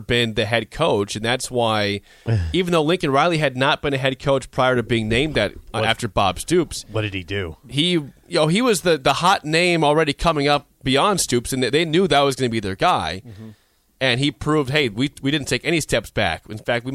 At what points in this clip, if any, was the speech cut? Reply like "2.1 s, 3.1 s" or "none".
none